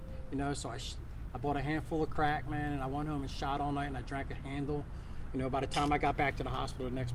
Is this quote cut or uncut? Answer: uncut